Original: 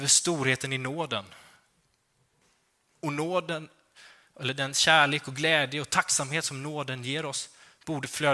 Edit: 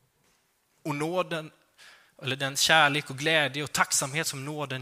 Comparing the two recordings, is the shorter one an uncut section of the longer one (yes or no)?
yes